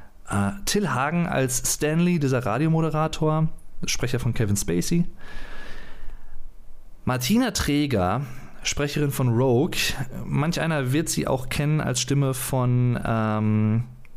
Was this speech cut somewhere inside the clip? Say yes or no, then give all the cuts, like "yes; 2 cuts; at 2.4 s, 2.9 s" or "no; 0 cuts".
no; 0 cuts